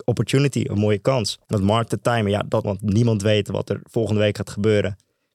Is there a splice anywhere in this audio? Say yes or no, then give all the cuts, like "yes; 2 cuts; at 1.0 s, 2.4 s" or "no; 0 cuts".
yes; 2 cuts; at 1.4 s, 2.6 s